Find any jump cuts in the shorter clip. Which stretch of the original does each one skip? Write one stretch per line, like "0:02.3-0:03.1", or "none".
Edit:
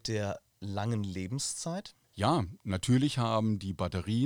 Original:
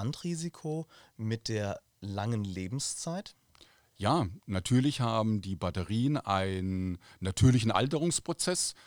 0:03.4-0:03.9